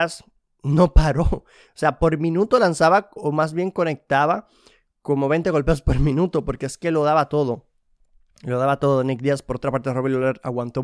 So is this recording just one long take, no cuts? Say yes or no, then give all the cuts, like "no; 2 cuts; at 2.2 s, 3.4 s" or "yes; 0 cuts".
no; 1 cut; at 3.2 s